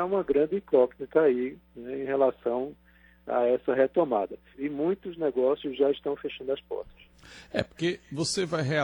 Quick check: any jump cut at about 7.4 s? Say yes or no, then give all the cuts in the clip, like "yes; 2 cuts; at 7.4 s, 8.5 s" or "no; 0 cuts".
no; 1 cut; at 4.5 s